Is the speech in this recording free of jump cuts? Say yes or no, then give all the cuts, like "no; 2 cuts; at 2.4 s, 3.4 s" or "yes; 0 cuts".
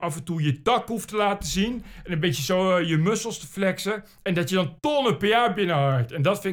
yes; 0 cuts